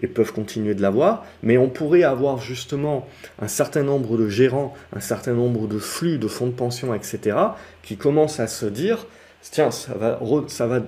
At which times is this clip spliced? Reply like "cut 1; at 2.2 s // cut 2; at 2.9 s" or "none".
none